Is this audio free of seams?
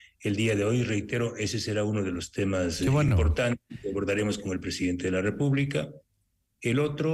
yes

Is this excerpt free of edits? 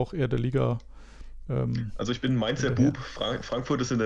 yes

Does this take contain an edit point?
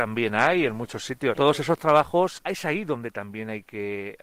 yes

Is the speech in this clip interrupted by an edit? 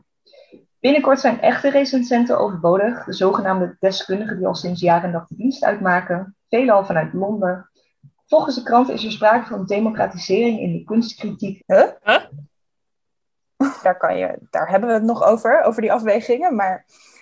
yes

